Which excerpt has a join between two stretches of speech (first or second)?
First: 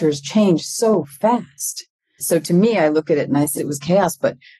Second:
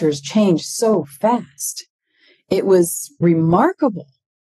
first